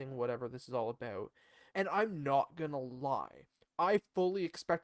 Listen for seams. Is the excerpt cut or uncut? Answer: cut